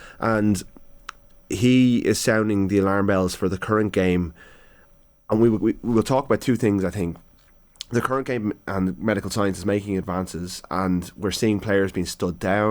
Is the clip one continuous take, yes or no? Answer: yes